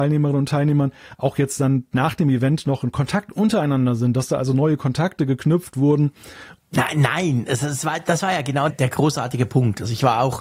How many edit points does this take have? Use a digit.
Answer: 2